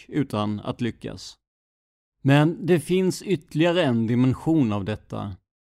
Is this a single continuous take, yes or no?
no